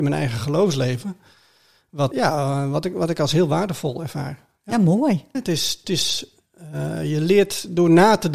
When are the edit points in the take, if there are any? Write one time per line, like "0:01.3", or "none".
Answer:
0:02.1
0:05.3